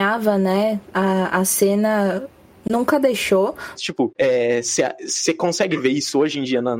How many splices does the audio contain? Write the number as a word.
one